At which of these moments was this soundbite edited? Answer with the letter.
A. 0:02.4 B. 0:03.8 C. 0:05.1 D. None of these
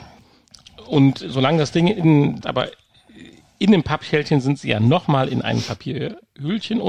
A